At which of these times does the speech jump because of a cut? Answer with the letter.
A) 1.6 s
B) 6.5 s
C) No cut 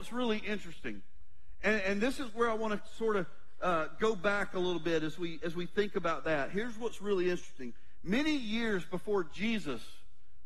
C